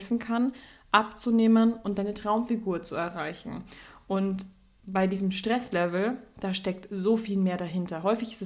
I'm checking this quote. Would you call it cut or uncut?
uncut